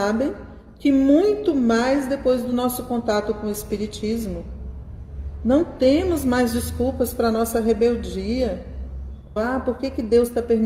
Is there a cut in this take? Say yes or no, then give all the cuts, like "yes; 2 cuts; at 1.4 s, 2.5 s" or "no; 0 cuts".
yes; 1 cut; at 9.4 s